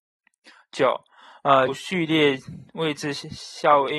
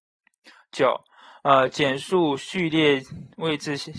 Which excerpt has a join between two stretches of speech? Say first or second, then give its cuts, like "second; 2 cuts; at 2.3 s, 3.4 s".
first; 1 cut; at 1.7 s